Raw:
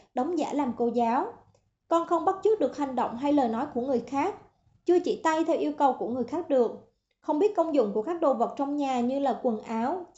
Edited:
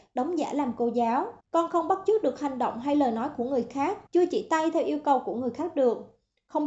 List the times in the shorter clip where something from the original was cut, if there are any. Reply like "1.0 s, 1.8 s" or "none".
1.4 s, 4.1 s

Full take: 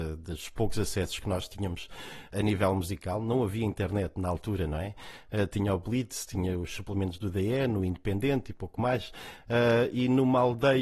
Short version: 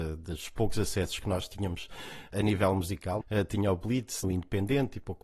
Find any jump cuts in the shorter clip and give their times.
3.2 s, 4.2 s

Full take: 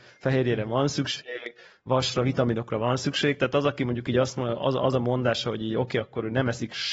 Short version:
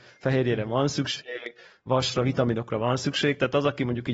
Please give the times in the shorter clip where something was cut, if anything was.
none

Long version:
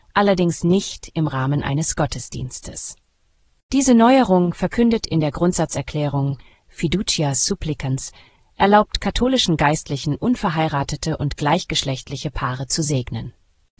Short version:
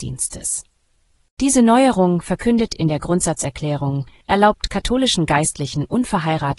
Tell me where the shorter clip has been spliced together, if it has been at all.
4.2 s

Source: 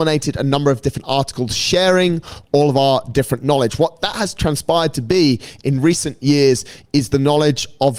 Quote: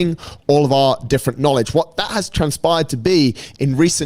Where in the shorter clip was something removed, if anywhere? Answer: none

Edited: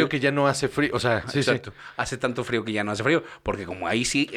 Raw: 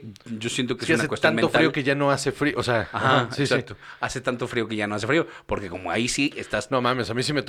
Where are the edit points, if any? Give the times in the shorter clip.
1.2 s

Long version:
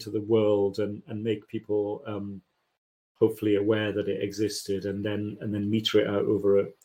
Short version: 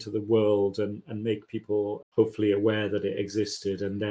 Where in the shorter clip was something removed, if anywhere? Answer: 2.0 s

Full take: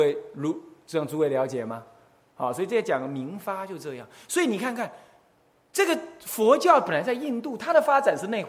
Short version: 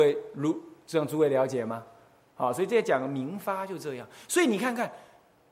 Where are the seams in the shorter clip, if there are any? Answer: none

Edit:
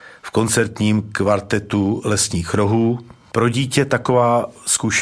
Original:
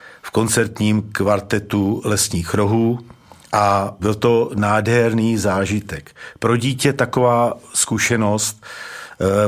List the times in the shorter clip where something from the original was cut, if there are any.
3.3 s

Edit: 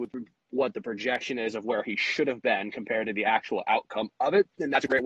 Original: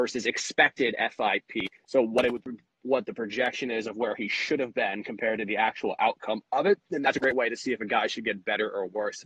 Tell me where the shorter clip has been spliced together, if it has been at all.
none

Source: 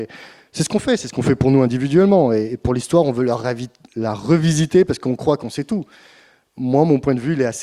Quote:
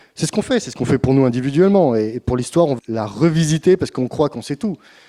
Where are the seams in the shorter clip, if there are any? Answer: 2.8 s

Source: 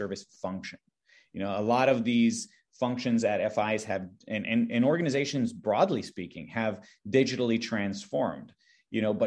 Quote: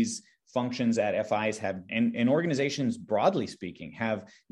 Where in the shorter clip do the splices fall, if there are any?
1.9 s

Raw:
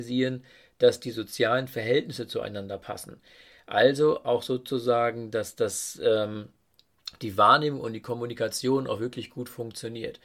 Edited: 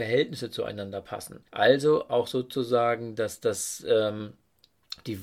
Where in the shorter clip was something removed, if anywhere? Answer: 1.5 s

